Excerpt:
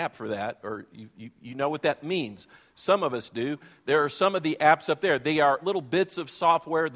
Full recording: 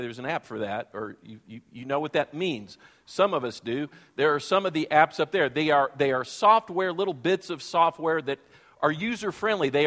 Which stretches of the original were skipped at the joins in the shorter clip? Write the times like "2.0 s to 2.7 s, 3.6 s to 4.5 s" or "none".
5.9 s to 6.9 s